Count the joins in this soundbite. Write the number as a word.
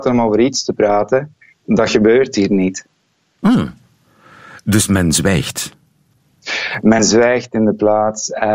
zero